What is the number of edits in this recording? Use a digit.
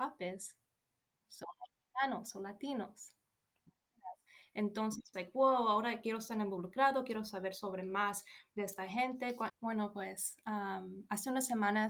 2